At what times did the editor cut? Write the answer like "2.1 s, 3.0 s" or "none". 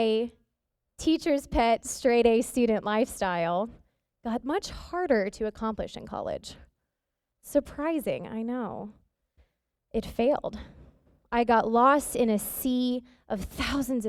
none